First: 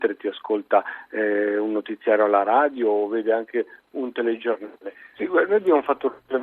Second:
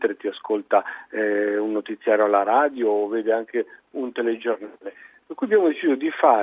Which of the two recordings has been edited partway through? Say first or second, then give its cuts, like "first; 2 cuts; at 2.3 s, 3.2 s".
first; 1 cut; at 5.2 s